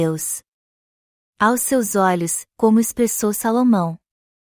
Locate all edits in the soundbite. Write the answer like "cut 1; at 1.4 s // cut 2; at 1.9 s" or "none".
cut 1; at 2.5 s